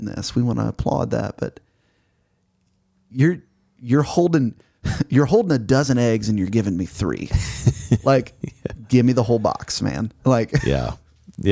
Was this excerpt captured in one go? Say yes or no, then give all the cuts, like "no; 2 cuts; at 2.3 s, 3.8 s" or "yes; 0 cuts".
yes; 0 cuts